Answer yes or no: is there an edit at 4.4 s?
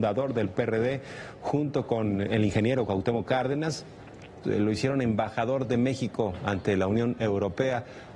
yes